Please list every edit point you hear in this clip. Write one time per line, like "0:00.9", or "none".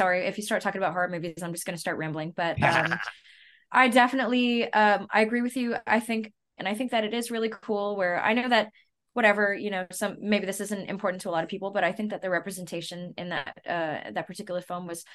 0:06.6